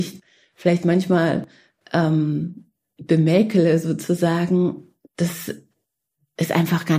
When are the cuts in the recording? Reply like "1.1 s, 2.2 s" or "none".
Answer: none